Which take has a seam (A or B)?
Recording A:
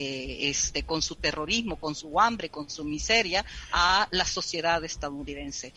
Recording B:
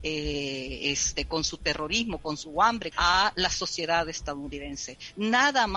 B